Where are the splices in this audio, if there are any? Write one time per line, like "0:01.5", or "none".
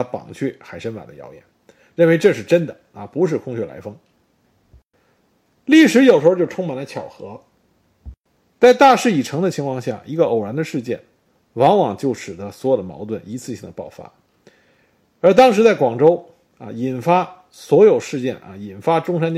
none